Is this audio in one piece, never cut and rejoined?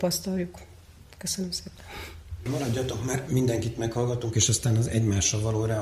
no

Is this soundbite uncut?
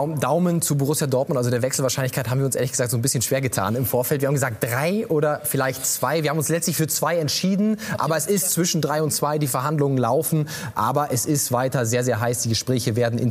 yes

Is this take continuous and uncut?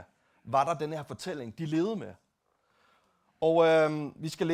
yes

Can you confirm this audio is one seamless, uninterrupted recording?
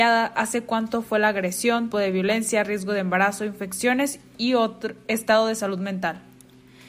no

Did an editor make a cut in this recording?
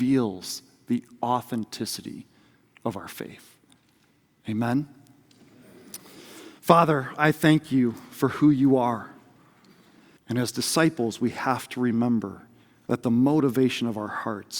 yes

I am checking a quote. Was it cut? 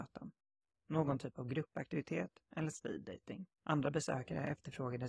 yes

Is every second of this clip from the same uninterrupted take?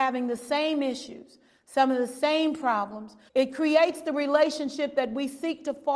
no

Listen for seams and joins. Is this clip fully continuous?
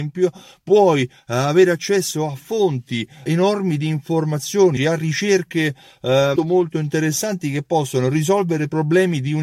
no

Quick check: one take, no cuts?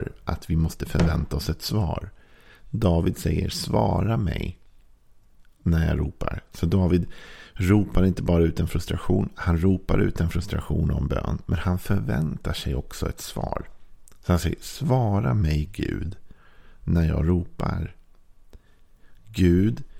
yes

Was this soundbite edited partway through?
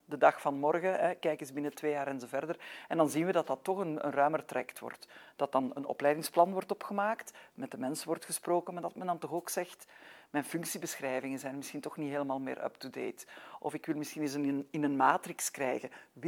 no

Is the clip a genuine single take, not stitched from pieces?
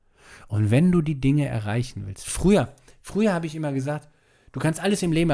yes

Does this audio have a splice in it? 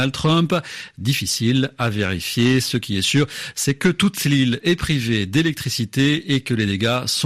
no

